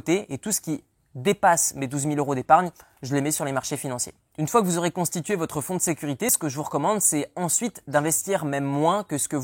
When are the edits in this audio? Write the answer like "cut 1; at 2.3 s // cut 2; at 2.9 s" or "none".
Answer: none